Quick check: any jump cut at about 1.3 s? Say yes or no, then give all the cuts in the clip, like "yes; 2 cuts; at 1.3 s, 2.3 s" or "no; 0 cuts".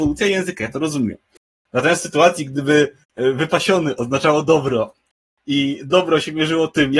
no; 1 cut; at 3.0 s